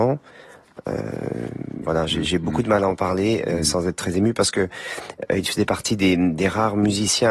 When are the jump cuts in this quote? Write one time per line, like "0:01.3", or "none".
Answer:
0:01.8